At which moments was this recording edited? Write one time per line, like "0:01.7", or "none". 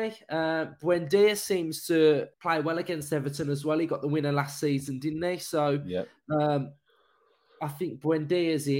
0:02.3